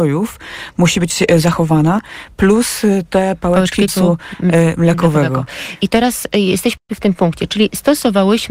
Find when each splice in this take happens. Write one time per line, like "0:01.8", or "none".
0:03.9